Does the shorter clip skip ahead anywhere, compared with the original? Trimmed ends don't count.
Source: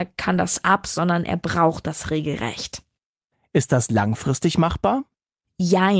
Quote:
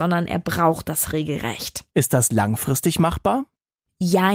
yes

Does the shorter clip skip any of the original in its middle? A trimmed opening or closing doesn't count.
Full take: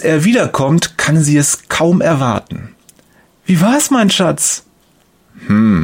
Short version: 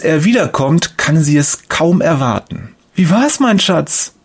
yes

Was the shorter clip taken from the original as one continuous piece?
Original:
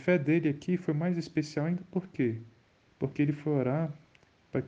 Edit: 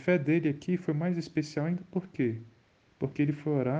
yes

